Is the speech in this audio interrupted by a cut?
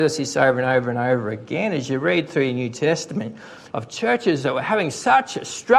yes; 1 cut; at 3.7 s

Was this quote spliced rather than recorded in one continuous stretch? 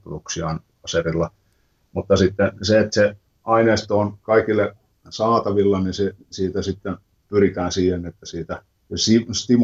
no; 0 cuts

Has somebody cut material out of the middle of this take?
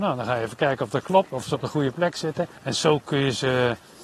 yes; 1 cut; at 2.5 s

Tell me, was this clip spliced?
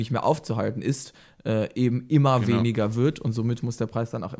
no; 0 cuts

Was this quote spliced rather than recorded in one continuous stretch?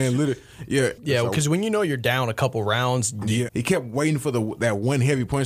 yes; 2 cuts; at 1.0 s, 3.5 s

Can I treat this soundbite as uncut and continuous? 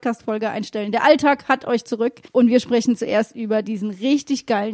no; 1 cut; at 2.3 s

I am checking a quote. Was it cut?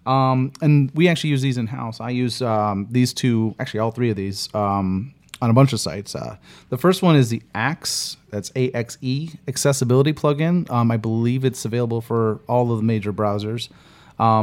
no; 0 cuts

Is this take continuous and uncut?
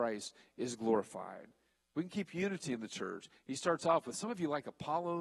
yes; 0 cuts

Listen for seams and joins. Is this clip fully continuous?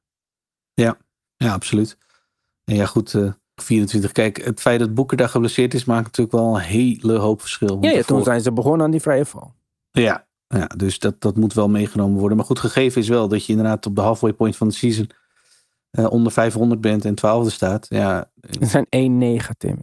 no; 1 cut; at 3.6 s

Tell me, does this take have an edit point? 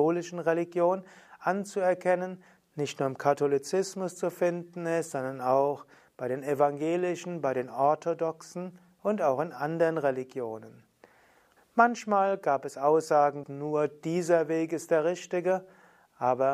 yes; 3 cuts; at 2.6 s, 11.6 s, 13.4 s

